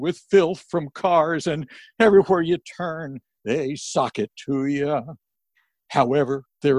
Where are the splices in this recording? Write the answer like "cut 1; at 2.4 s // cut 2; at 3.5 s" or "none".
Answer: none